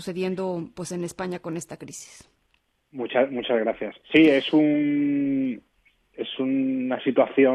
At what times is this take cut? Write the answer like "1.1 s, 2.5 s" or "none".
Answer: 4.0 s